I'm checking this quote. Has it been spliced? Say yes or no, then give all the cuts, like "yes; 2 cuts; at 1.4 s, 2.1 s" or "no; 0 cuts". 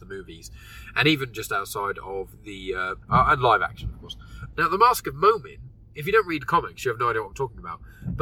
yes; 2 cuts; at 3.0 s, 4.5 s